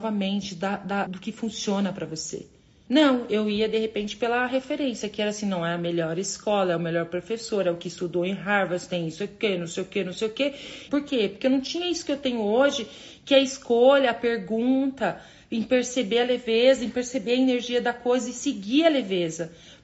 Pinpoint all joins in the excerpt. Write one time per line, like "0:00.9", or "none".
0:01.1
0:02.9
0:10.9